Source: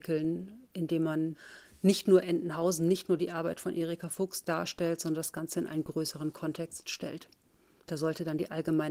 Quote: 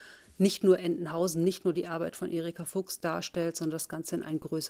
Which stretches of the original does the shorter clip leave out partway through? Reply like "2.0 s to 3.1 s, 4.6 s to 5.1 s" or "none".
none